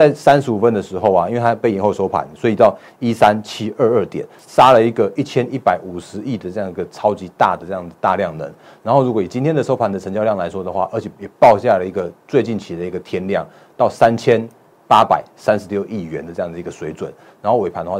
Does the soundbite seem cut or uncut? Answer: cut